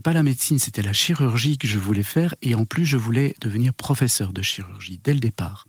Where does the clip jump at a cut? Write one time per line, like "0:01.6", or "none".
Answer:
none